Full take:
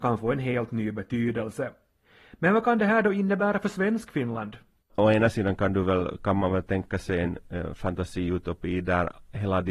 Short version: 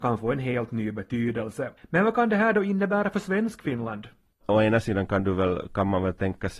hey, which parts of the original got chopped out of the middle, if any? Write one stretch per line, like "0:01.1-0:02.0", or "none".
0:01.8-0:02.3